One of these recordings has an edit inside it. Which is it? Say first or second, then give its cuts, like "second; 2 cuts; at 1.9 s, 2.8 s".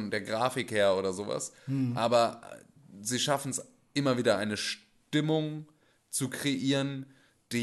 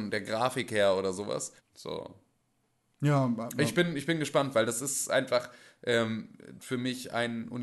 second; 2 cuts; at 1.6 s, 6.6 s